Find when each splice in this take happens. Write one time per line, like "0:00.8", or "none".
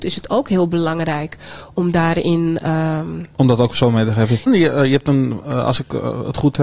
0:04.5

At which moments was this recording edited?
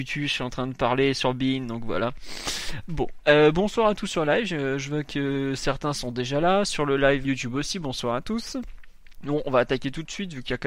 0:07.2

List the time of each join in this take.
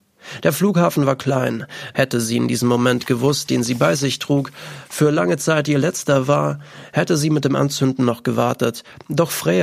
0:01.9
0:03.5

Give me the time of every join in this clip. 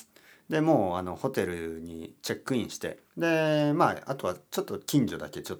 0:03.1

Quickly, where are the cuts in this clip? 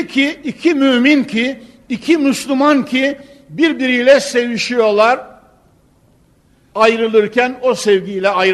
0:06.7

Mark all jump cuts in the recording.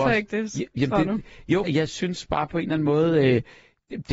0:01.6

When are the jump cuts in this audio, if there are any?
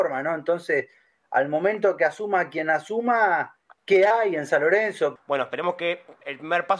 0:03.8
0:05.2

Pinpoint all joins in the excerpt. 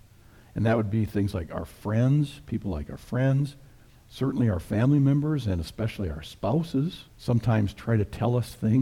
0:04.0
0:07.1

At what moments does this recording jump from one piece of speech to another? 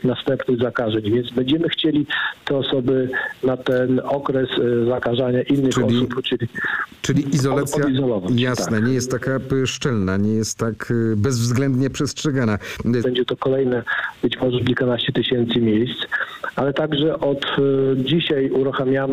0:13.0

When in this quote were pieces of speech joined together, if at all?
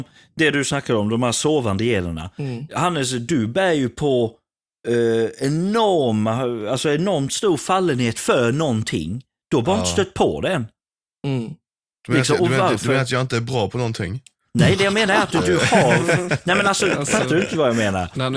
none

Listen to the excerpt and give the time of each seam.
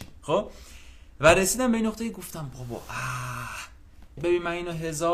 0:04.2

